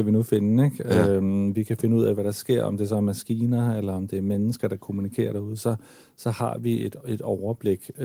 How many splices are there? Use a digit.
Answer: 0